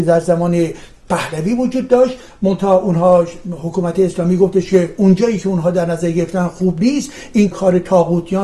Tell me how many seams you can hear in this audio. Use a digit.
1